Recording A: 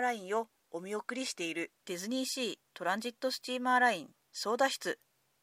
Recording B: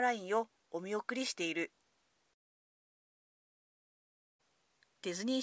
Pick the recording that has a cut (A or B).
A